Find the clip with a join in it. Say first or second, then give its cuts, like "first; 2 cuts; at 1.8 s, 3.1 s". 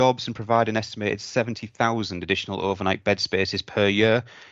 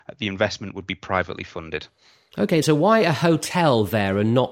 second; 1 cut; at 2.6 s